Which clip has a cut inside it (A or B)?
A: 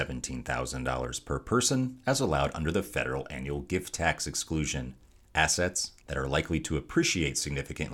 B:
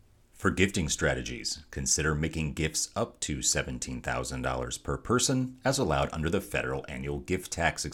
A